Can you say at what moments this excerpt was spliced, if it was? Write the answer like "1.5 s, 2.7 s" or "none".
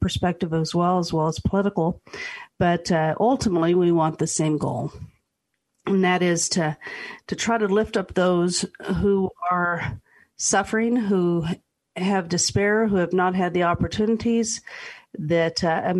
none